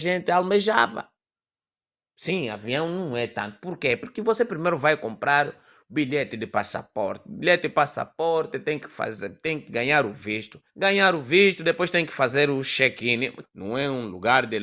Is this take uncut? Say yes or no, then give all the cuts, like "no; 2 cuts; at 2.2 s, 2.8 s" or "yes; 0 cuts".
no; 2 cuts; at 10.7 s, 13.4 s